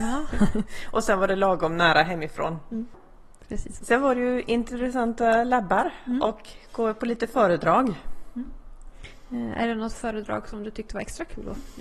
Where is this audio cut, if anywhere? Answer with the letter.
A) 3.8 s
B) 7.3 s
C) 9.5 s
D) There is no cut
A